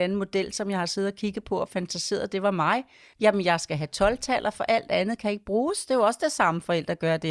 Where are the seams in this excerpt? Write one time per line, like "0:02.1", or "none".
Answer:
none